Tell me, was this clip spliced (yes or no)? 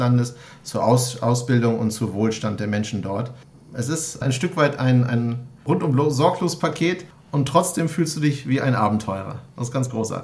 no